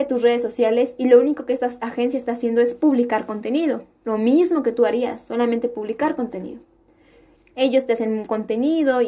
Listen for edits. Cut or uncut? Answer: cut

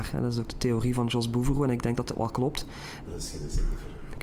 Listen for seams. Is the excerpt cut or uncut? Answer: cut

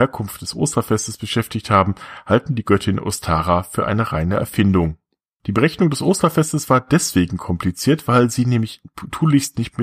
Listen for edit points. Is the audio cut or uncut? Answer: cut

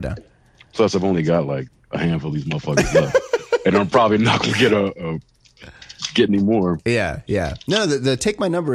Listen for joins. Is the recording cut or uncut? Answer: uncut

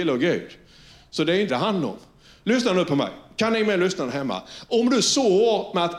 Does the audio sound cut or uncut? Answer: cut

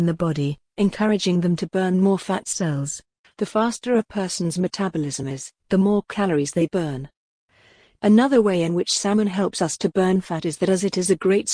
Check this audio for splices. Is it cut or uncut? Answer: cut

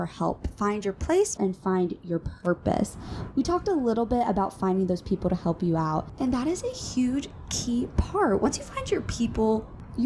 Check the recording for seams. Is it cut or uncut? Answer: cut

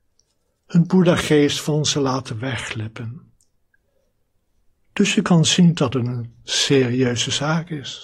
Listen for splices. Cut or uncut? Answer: uncut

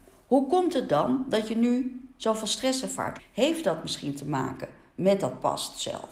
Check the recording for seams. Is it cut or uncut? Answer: cut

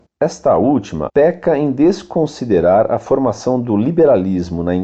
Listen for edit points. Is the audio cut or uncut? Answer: cut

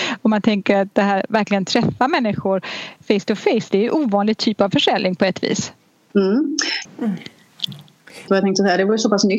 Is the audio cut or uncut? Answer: cut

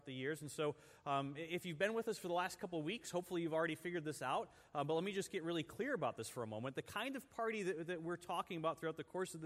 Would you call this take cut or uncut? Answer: uncut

